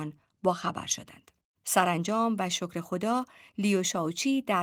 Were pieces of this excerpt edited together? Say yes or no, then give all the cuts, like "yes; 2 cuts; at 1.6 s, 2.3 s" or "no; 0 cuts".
yes; 1 cut; at 1.6 s